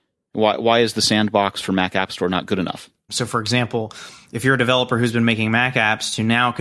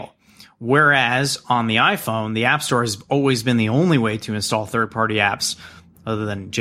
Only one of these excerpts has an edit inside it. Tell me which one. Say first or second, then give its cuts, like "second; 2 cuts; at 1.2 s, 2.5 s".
first; 1 cut; at 3.1 s